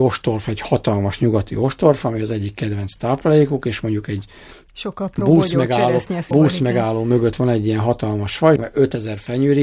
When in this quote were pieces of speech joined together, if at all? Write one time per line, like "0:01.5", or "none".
0:06.3
0:08.6